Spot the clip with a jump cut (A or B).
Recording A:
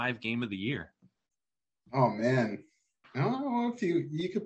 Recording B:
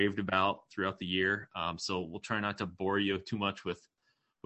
A